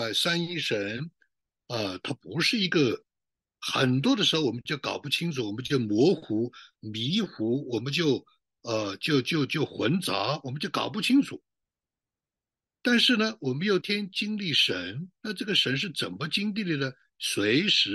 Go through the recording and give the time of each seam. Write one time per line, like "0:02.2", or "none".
0:13.8
0:15.1